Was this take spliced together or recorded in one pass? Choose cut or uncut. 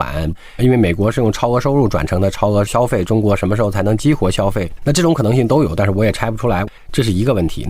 cut